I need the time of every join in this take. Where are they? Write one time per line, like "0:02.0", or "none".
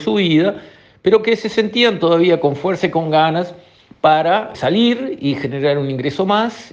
0:04.5